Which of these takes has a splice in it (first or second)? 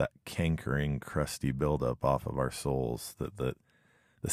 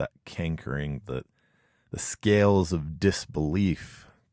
second